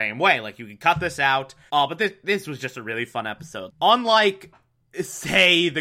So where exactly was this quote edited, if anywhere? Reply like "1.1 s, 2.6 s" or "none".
1.7 s, 3.7 s